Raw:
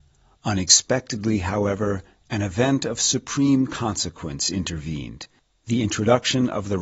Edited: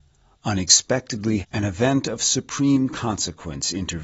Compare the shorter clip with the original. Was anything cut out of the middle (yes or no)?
yes